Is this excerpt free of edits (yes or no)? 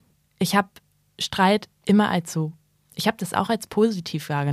yes